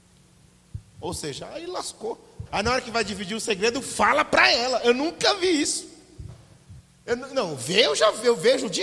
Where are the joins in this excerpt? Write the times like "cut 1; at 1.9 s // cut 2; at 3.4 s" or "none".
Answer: cut 1; at 0.9 s // cut 2; at 2.5 s